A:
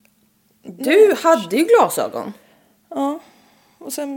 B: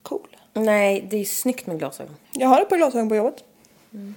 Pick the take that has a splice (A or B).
B